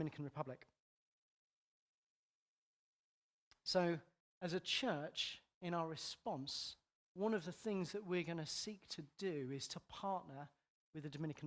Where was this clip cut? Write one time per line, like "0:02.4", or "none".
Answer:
0:04.2